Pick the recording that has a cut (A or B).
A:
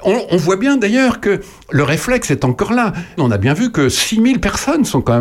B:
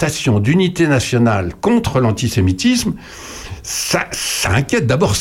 A